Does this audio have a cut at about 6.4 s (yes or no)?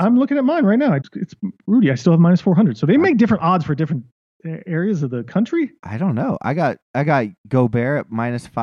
no